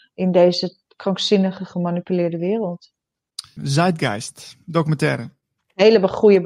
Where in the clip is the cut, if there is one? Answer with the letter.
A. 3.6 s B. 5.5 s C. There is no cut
A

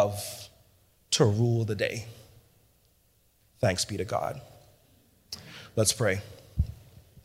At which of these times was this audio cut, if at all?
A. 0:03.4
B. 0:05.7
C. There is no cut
A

